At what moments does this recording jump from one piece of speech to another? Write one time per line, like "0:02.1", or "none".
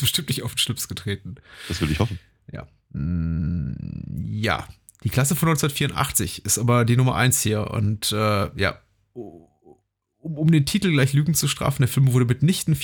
none